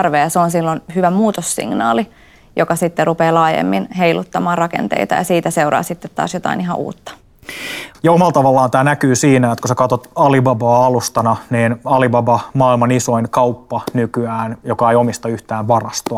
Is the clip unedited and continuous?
no; 1 cut; at 7.9 s

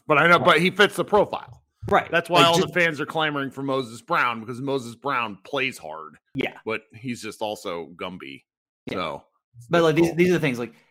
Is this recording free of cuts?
yes; 0 cuts

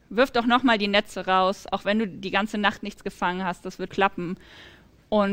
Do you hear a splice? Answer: yes; 1 cut; at 3.9 s

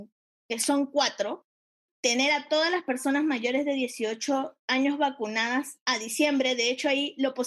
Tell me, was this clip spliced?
yes; 1 cut; at 1.9 s

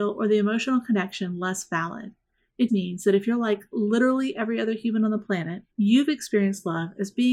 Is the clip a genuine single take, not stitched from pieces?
no; 2 cuts; at 2.7 s, 5.7 s

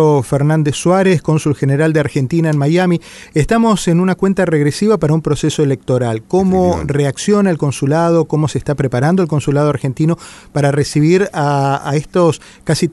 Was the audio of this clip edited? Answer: no; 0 cuts

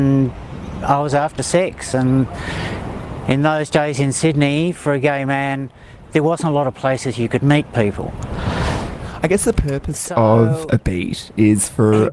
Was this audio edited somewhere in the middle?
no; 0 cuts

